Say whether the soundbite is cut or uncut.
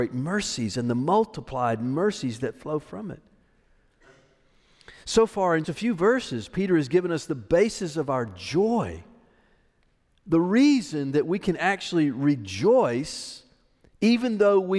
cut